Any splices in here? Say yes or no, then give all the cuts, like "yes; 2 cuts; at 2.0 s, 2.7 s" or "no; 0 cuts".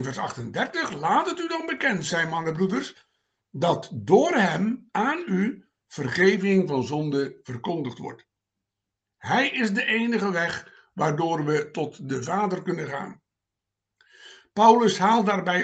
yes; 1 cut; at 9.0 s